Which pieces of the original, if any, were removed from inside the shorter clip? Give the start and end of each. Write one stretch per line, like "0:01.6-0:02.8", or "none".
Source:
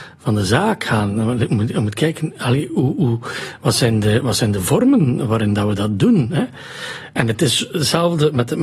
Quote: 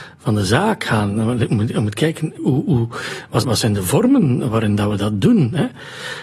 0:02.4-0:02.7
0:03.7-0:04.2